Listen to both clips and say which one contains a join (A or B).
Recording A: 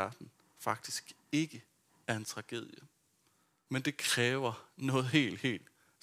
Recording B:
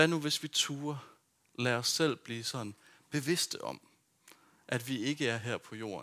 A